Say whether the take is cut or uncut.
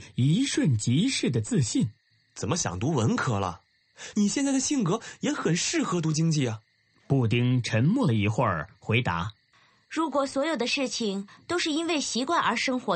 cut